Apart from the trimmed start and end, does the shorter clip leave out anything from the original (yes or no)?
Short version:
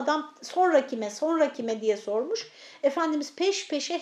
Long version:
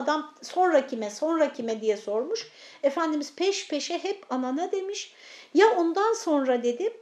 no